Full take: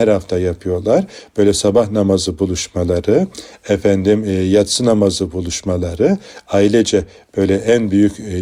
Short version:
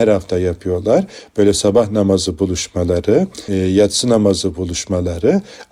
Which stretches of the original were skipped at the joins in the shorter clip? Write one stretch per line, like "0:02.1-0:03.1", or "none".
0:03.5-0:04.2